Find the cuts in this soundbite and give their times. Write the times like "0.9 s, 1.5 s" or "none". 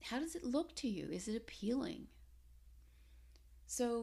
none